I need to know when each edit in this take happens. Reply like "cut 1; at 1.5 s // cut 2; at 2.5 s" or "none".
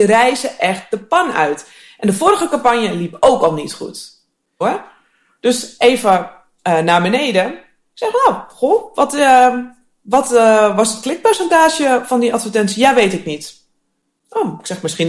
cut 1; at 4.6 s